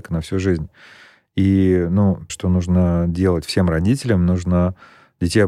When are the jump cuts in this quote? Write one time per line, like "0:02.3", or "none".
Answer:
0:02.3